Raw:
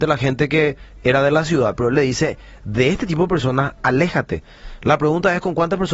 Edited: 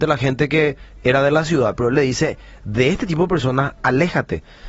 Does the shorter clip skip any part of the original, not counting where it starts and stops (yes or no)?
no